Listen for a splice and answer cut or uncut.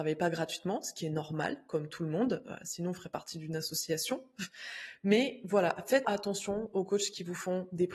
cut